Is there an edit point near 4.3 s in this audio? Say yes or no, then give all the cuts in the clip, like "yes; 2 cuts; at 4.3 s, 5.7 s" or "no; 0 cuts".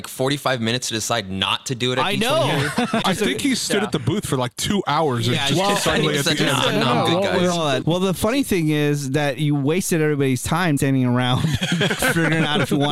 no; 3 cuts; at 3.0 s, 7.8 s, 10.8 s